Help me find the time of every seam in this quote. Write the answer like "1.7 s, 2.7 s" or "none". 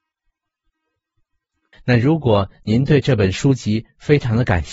1.7 s